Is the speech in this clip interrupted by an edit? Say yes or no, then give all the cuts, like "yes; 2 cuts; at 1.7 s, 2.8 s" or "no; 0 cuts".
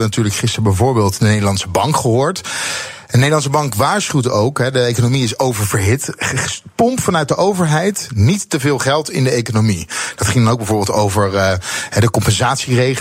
no; 0 cuts